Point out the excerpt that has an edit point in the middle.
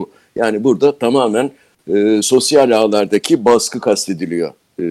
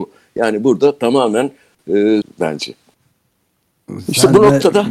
second; 1 cut; at 2.2 s

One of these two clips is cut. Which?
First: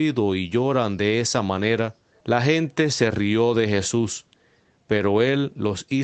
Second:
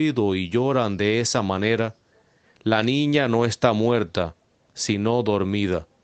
first; 1 cut; at 2.2 s

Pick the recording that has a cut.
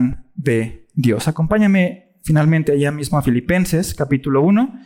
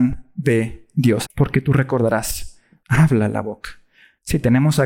second; 2 cuts; at 1.2 s, 2.8 s

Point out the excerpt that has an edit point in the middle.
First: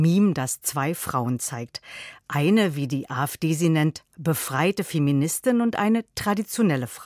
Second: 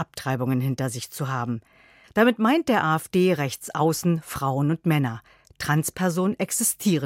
second; 1 cut; at 2.0 s

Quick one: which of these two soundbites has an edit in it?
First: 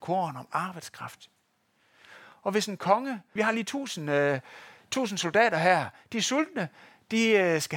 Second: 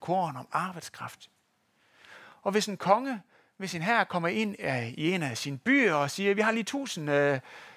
first; 1 cut; at 3.4 s

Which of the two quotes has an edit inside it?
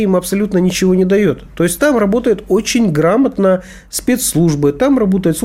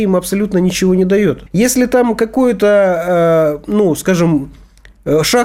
second; 1 cut; at 1.5 s

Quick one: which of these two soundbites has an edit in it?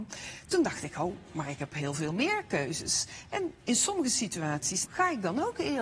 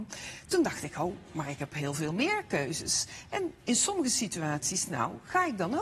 first; 1 cut; at 4.9 s

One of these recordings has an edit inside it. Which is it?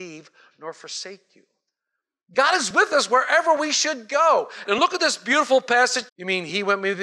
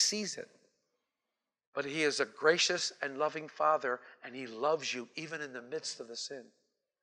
first; 2 cuts; at 4.6 s, 6.1 s

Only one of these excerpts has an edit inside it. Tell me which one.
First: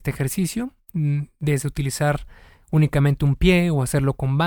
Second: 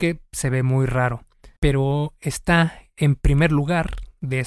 second; 1 cut; at 1.6 s

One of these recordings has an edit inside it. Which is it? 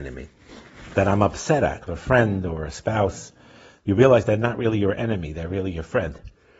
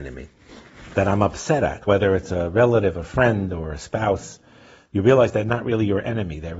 first; 1 cut; at 1.9 s

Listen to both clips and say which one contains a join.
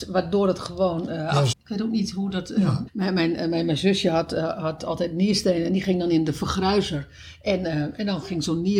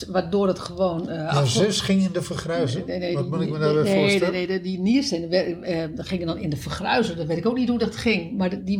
first; 2 cuts; at 1.5 s, 2.9 s

